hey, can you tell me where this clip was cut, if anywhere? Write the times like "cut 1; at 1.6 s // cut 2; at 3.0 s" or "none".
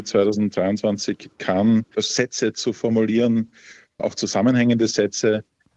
cut 1; at 1.9 s